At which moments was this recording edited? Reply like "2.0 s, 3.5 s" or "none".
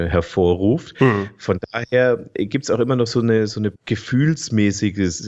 3.8 s